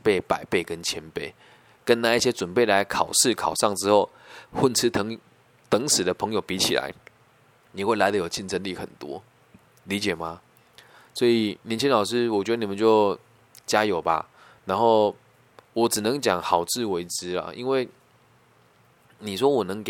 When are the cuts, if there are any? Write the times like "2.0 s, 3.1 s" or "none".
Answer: none